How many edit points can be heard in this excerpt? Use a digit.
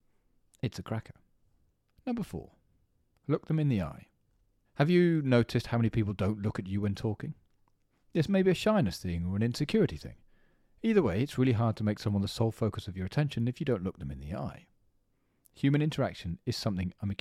1